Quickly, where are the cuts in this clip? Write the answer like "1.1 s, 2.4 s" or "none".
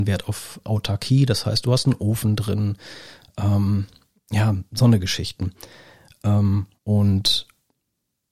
6.8 s